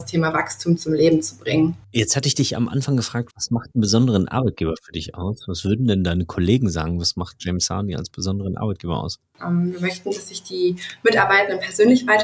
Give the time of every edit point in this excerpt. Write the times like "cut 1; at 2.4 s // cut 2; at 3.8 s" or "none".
cut 1; at 3.3 s // cut 2; at 9.4 s